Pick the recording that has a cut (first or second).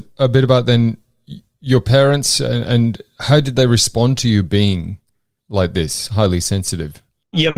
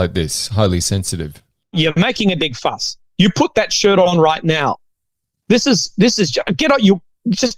second